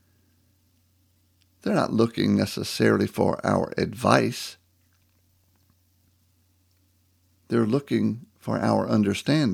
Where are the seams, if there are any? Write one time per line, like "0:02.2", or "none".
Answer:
none

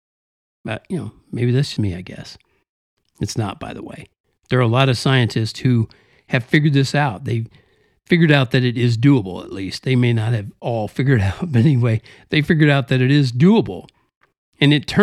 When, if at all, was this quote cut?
0:01.8

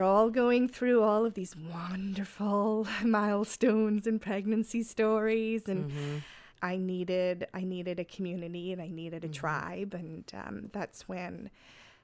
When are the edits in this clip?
0:06.5

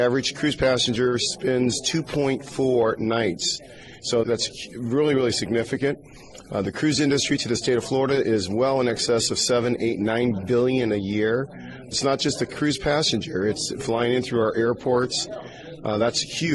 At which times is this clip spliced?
0:04.2

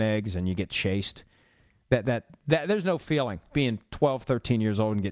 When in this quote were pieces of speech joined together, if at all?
0:03.5

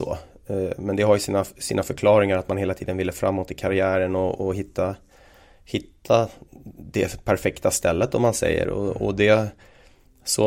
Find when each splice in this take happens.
none

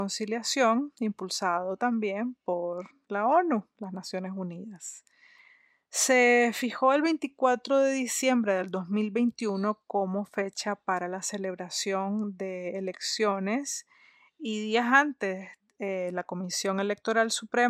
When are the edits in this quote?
none

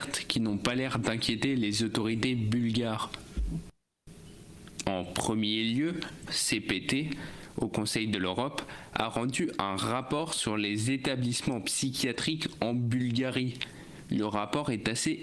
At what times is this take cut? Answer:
0:04.8
0:06.3

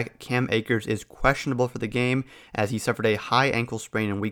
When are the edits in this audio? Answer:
none

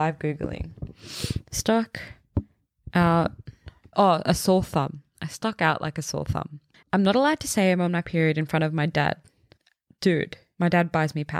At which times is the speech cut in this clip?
0:03.9
0:06.8

